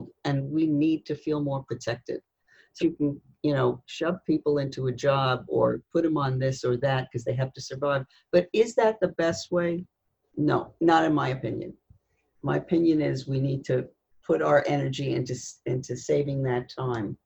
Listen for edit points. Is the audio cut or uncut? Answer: cut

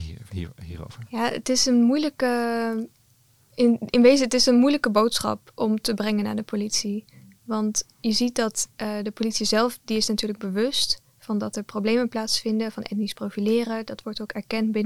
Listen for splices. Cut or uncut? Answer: uncut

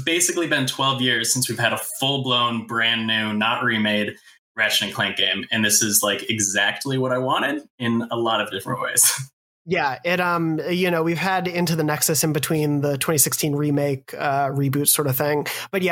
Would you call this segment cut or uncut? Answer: uncut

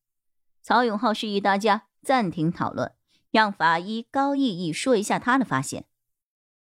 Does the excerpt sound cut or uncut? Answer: uncut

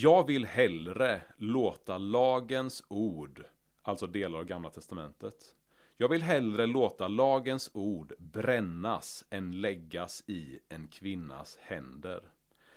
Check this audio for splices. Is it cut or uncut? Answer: uncut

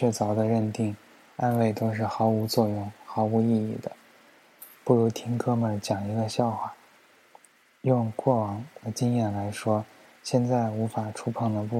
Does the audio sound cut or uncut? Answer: uncut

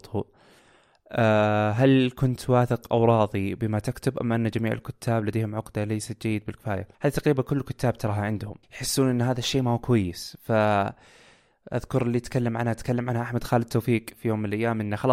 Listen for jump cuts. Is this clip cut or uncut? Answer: cut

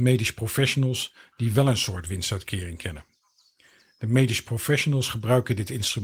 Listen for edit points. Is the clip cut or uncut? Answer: uncut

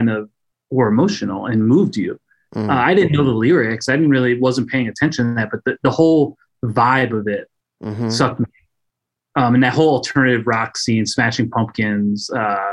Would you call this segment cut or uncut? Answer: uncut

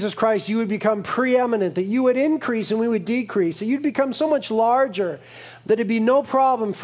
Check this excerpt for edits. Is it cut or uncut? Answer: uncut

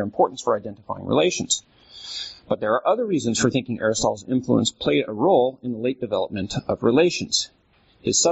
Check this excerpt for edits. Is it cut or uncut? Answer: uncut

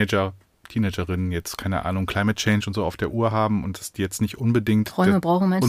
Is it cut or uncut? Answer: uncut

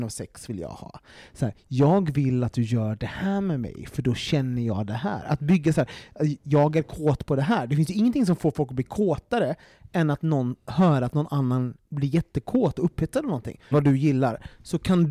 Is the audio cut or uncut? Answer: cut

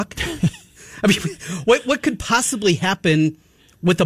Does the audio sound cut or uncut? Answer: uncut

